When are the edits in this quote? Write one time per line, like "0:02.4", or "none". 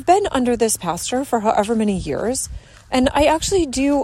none